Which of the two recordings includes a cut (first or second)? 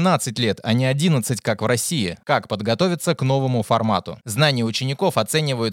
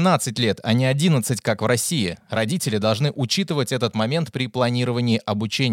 first